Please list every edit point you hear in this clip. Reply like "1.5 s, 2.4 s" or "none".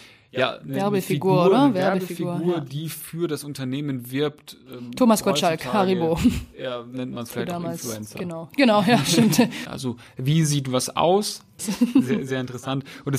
9.7 s, 11.6 s